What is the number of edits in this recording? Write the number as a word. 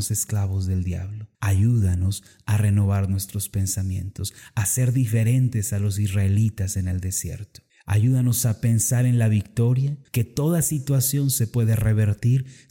two